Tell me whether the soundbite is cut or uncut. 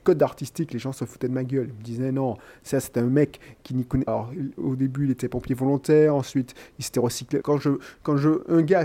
cut